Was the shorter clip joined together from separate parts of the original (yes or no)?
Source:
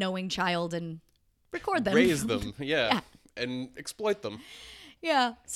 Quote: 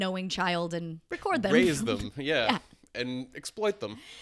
yes